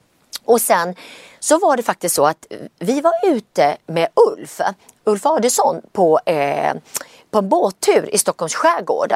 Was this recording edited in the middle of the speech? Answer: no; 0 cuts

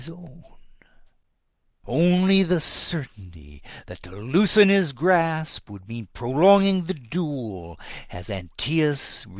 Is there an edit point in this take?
yes; 1 cut; at 1.8 s

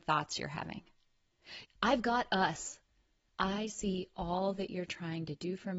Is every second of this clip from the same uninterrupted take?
no; 2 cuts; at 1.6 s, 3.3 s

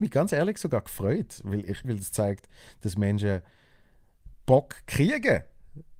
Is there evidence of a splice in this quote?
yes; 1 cut; at 1.8 s

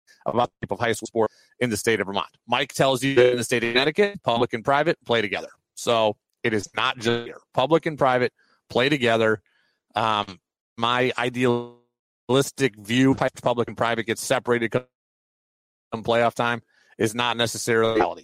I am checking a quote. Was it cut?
yes; 1 cut; at 10.6 s

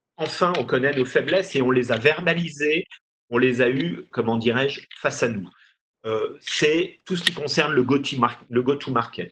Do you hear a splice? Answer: yes; 1 cut; at 4.1 s

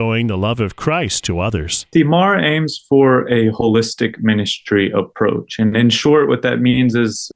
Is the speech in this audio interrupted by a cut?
no; 0 cuts

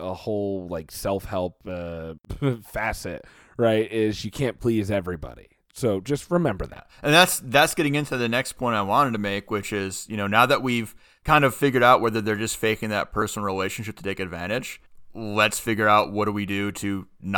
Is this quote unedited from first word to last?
yes; 0 cuts

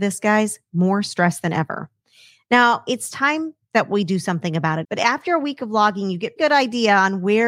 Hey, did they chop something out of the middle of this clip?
yes; 2 cuts; at 4.8 s, 6.4 s

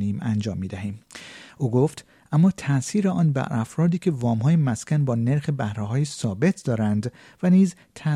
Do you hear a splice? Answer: yes; 1 cut; at 1.5 s

